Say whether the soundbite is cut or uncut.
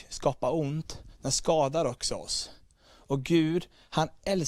uncut